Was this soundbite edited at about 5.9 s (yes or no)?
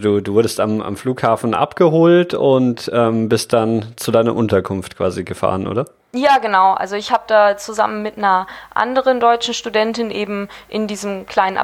no